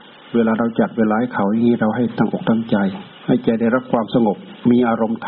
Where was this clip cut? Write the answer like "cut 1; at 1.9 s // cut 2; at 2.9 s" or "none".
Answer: cut 1; at 3.1 s